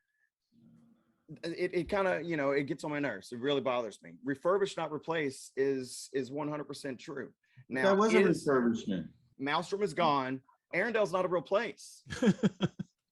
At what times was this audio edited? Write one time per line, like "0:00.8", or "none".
0:09.3
0:10.7